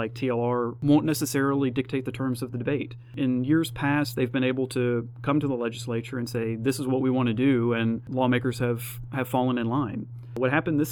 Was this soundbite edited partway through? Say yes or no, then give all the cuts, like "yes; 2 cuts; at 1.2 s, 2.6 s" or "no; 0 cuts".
no; 0 cuts